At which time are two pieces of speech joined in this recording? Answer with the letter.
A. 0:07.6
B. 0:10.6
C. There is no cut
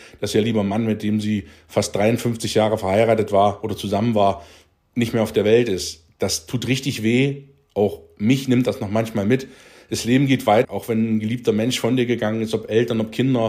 B